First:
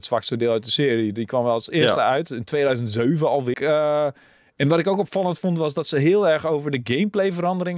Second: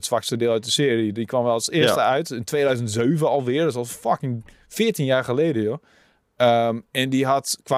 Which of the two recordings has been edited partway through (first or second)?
first